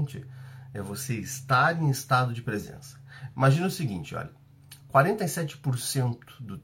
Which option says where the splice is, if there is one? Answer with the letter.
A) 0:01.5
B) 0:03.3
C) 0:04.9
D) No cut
D